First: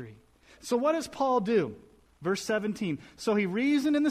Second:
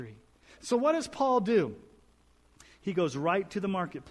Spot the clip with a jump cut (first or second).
first